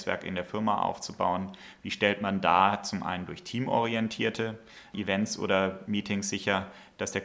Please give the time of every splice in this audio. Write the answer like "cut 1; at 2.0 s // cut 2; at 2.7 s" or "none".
none